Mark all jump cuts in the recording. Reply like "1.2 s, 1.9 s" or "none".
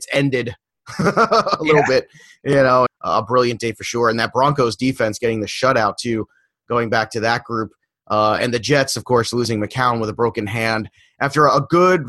2.9 s